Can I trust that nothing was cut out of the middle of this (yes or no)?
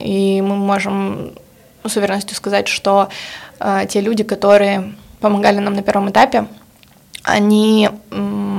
yes